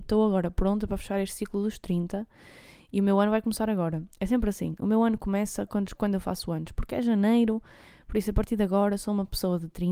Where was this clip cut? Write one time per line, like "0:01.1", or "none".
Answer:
none